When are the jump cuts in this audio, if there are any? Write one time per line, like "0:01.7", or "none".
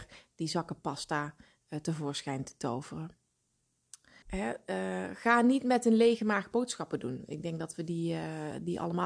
0:04.2

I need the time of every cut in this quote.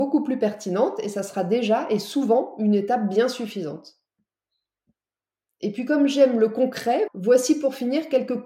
0:07.1

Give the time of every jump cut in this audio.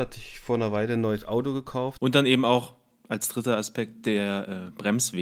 0:02.0

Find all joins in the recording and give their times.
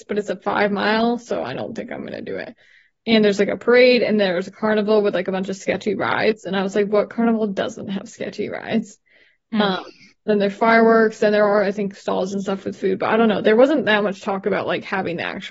none

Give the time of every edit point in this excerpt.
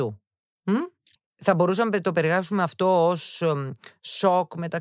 0:01.2

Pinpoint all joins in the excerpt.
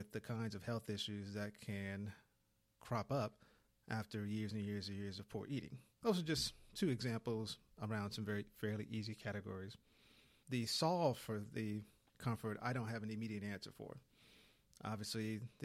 none

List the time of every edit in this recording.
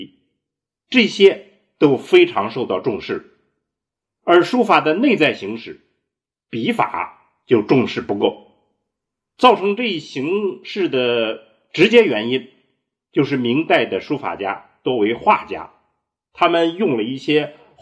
none

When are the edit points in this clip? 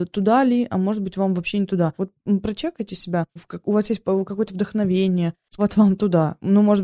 0:02.0
0:03.4
0:05.6

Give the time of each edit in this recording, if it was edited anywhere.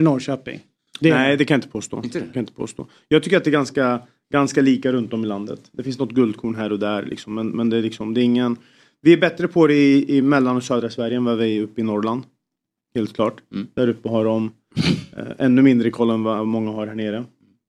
none

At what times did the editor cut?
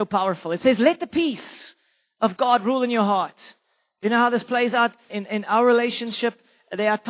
0:05.1

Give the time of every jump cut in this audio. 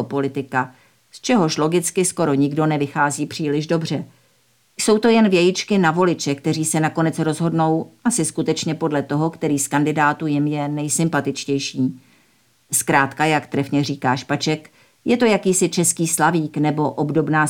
0:04.7

